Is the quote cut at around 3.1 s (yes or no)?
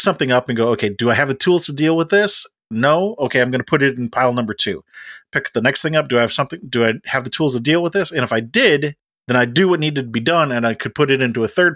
no